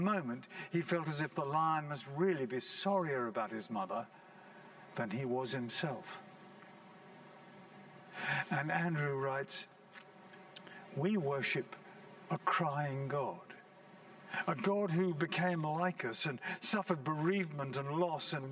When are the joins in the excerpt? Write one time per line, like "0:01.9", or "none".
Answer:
none

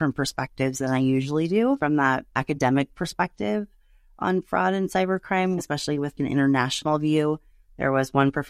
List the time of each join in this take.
0:05.6

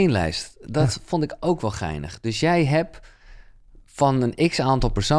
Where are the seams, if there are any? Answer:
none

